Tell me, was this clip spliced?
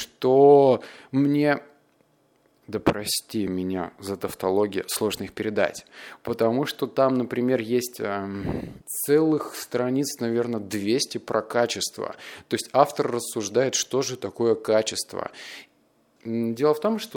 yes; 2 cuts; at 8.8 s, 16.2 s

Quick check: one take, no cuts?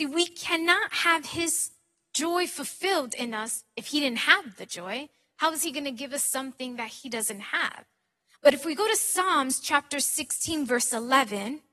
yes; 0 cuts

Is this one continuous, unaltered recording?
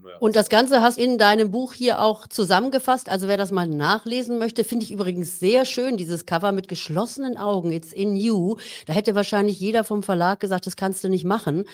no; 1 cut; at 1.0 s

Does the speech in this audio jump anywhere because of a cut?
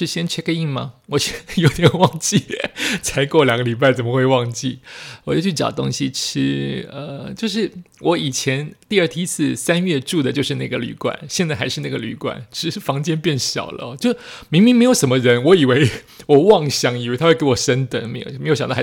no; 0 cuts

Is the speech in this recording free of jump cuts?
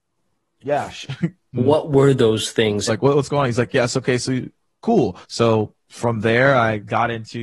no; 3 cuts; at 1.5 s, 2.9 s, 5.2 s

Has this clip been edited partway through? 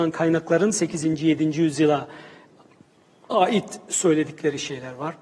no; 0 cuts

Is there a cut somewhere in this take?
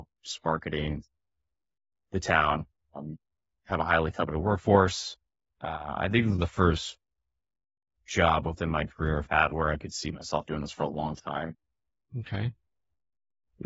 yes; 2 cuts; at 5.5 s, 12.1 s

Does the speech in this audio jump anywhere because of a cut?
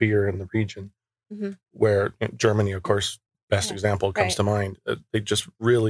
no; 0 cuts

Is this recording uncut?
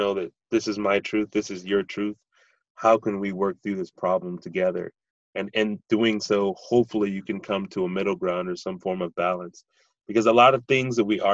yes; 0 cuts

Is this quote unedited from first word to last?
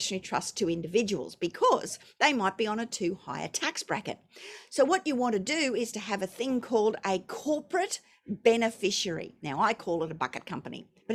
yes; 0 cuts

